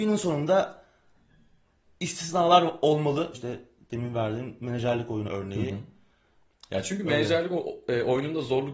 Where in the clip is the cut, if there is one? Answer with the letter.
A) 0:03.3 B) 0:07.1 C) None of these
A